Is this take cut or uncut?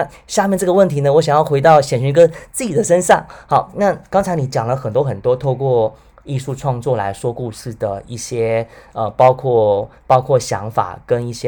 uncut